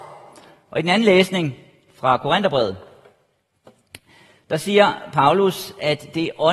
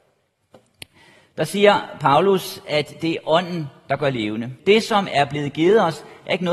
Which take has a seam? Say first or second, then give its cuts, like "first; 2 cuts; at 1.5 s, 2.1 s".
second; 1 cut; at 4.6 s